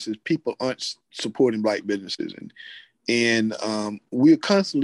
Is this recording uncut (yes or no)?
yes